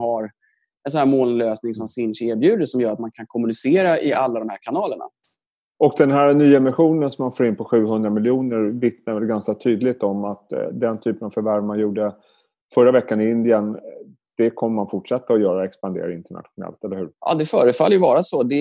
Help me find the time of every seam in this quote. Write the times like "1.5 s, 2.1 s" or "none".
17.1 s

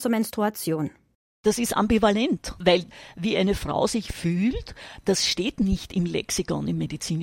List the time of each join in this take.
none

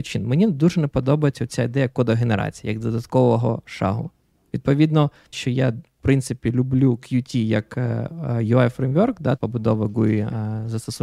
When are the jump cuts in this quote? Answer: 5.3 s, 9.4 s

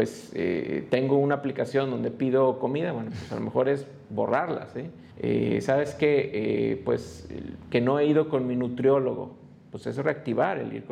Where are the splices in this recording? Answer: 5.1 s

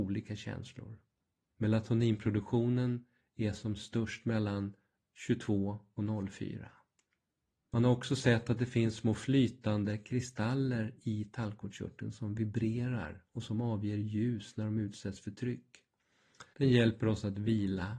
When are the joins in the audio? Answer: 1.5 s, 7.5 s, 16.5 s

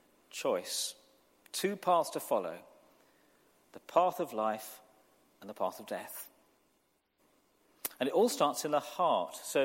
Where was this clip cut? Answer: none

